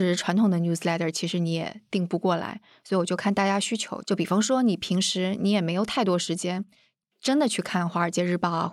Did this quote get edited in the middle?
yes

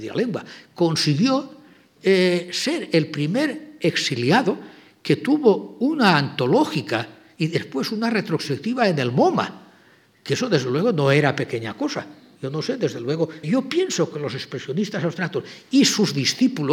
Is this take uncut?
no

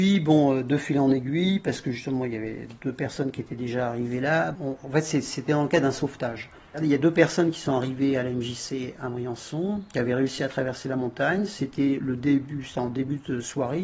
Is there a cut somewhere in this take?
yes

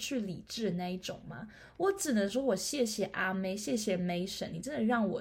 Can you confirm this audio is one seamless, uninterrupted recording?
yes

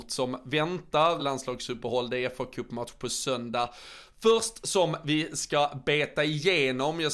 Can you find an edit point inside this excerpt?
yes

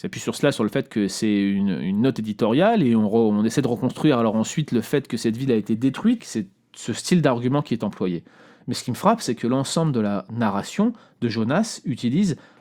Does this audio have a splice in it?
yes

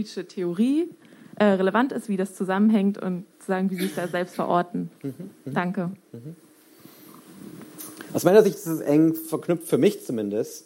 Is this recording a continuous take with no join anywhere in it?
no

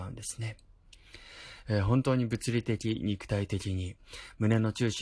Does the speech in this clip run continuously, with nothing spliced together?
no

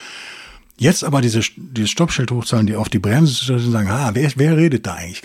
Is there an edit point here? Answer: no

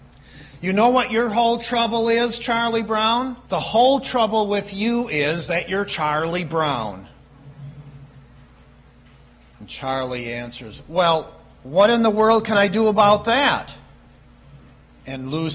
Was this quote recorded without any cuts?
no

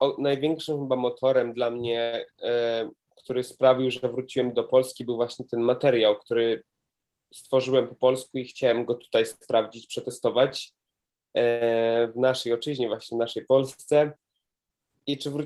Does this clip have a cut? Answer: no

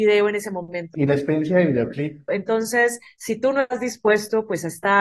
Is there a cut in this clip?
yes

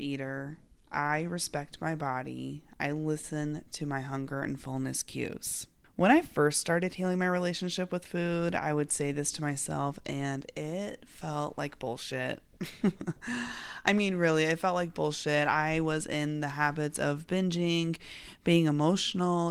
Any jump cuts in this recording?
no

